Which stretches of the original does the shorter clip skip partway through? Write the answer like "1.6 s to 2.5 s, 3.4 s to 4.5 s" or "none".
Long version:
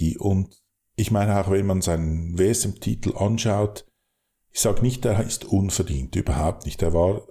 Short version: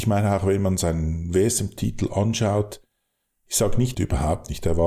5.0 s to 6.1 s